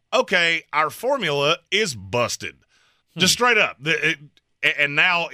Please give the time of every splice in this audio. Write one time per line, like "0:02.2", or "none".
0:03.0